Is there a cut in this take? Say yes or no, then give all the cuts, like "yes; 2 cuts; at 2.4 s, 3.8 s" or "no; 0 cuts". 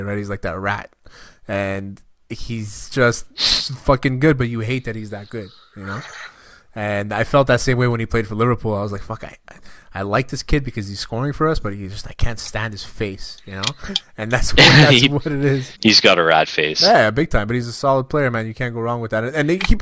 yes; 1 cut; at 15.7 s